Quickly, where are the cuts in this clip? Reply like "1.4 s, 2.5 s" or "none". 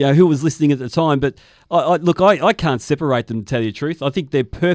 none